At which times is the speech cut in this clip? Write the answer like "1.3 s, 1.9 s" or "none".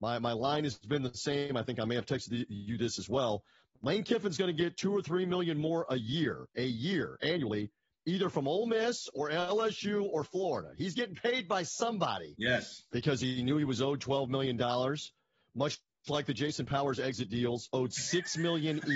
12.9 s